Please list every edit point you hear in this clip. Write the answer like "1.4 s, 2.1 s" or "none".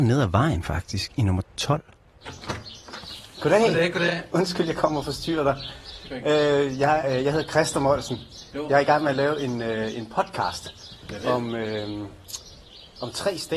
7.0 s